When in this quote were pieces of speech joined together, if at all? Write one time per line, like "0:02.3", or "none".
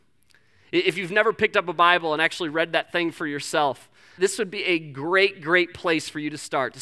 0:04.2